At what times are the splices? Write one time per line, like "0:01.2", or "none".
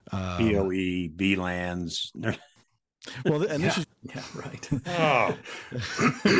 0:03.8